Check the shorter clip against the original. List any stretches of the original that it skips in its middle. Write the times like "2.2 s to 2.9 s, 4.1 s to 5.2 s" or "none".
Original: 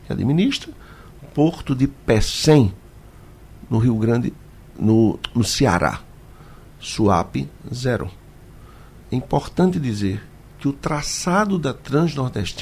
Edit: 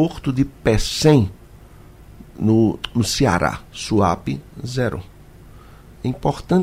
3.7 s to 4.6 s, 6.1 s to 6.8 s